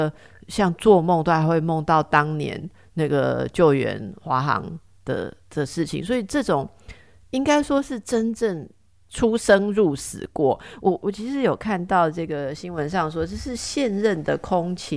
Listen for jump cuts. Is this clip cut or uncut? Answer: cut